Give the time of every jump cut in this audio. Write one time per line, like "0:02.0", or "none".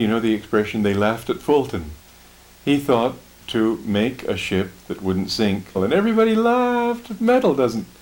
0:05.7